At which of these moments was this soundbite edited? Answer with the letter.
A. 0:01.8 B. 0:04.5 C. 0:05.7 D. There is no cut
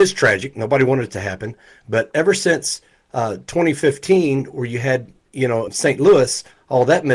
C